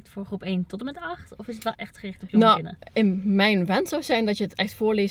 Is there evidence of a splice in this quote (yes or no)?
yes